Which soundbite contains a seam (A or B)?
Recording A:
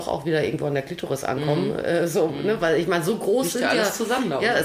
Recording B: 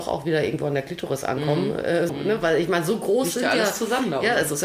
B